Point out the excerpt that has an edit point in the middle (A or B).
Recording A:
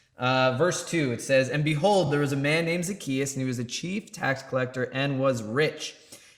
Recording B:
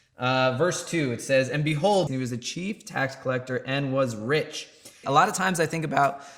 B